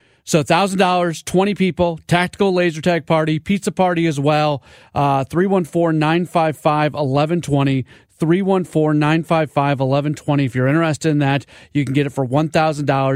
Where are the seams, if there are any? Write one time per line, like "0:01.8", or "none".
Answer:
none